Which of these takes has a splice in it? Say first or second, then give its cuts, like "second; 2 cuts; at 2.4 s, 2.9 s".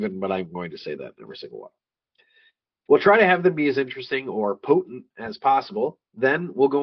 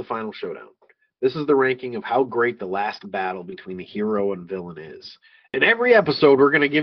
second; 1 cut; at 5.5 s